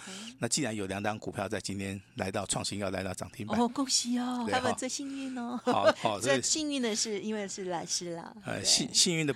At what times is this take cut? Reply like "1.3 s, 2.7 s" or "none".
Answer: 4.5 s, 5.9 s